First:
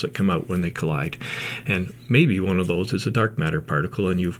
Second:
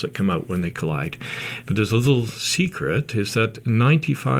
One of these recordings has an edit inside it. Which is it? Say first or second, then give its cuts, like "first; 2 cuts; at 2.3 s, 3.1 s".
second; 1 cut; at 1.6 s